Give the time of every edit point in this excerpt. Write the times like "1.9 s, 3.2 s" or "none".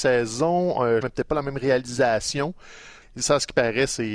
1.0 s, 3.0 s